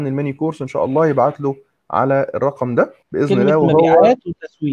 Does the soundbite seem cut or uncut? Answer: cut